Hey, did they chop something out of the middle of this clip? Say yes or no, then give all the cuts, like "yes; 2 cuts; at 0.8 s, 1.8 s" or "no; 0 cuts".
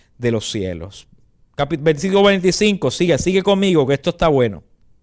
no; 0 cuts